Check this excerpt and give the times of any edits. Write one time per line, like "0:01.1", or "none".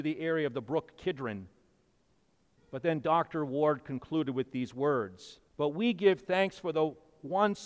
0:02.6
0:05.5